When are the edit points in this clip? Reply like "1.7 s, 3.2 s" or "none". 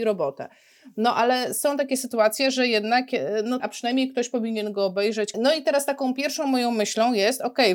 3.6 s, 5.3 s